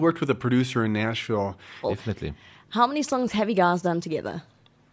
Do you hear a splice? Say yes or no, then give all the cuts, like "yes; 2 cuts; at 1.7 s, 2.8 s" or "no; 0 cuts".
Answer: yes; 1 cut; at 1.8 s